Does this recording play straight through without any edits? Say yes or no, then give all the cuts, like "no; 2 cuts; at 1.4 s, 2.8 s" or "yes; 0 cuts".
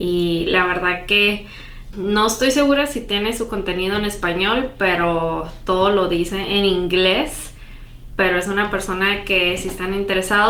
no; 1 cut; at 1.9 s